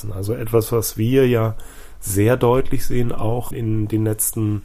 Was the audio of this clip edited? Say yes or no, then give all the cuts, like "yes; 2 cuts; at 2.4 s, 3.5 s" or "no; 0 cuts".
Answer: yes; 1 cut; at 3.5 s